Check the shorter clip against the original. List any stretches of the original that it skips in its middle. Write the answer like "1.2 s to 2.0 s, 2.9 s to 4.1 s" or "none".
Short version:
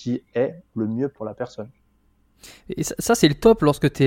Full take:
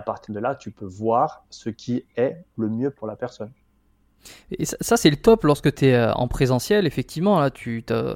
none